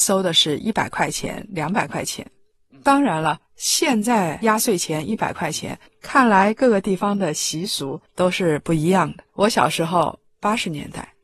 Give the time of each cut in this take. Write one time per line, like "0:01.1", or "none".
0:05.9
0:09.3